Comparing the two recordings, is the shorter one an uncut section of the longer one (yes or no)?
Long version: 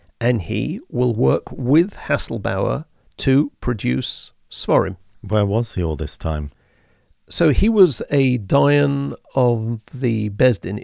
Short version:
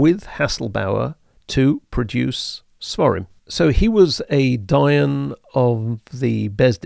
no